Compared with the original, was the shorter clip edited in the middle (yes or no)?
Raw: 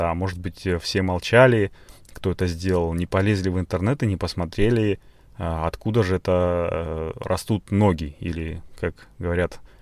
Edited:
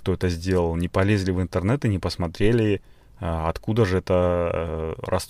no